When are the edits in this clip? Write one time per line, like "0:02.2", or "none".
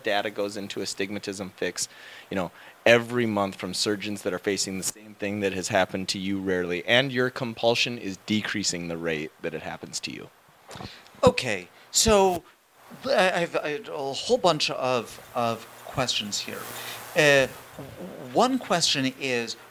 none